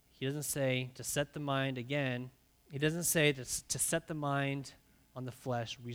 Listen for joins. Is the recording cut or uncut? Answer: cut